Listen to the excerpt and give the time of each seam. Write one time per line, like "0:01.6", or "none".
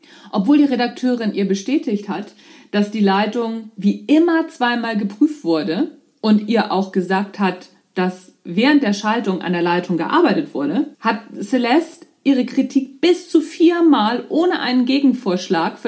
0:10.9